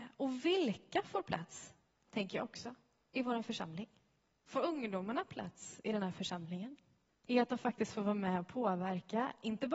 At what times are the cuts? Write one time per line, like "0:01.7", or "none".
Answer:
0:04.3
0:07.1